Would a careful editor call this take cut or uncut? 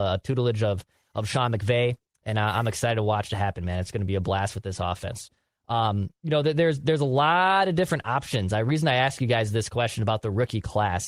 uncut